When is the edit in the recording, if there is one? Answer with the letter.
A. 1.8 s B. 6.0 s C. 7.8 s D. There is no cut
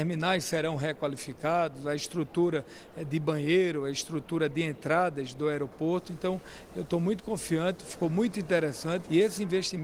C